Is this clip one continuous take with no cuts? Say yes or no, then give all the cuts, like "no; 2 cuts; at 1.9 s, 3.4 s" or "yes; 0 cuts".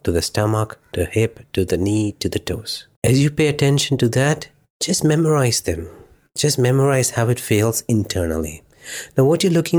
no; 1 cut; at 2.9 s